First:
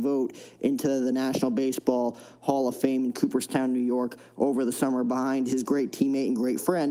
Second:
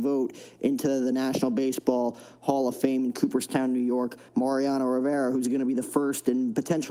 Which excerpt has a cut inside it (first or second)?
second